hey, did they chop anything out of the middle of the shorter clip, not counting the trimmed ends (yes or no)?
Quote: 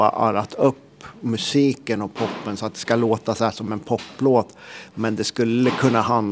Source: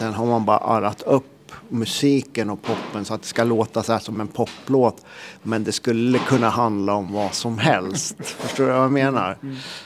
no